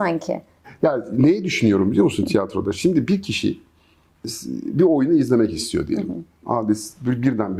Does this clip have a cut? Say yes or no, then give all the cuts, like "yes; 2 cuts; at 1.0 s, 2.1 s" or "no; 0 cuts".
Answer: yes; 1 cut; at 6.4 s